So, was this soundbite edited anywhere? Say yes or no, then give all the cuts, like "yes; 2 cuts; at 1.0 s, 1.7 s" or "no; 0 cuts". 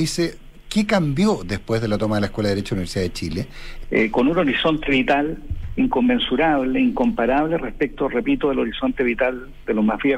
yes; 1 cut; at 3.8 s